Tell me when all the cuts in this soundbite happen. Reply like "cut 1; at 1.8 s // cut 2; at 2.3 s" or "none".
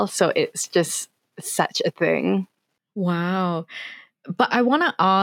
none